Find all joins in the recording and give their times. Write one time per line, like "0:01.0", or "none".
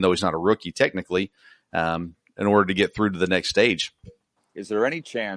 0:04.4